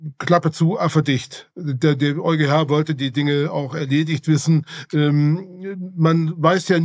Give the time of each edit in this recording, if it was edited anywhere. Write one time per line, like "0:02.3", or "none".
0:04.9

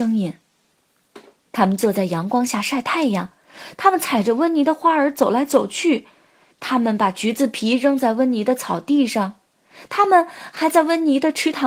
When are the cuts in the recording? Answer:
0:01.4

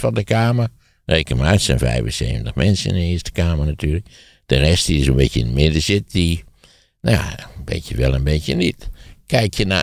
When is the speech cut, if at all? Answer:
none

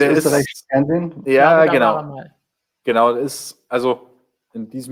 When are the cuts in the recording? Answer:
0:01.2

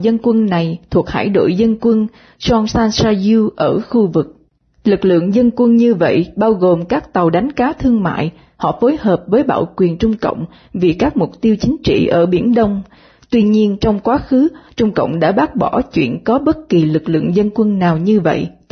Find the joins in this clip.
none

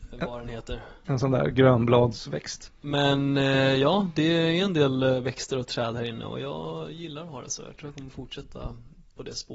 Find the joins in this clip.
0:02.7

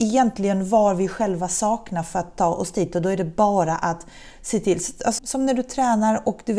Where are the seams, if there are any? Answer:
0:05.2

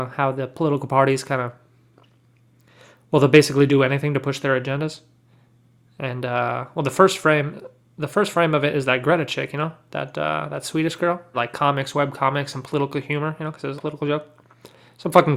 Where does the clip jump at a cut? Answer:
0:11.3
0:13.8

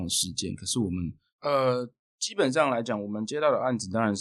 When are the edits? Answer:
0:01.3

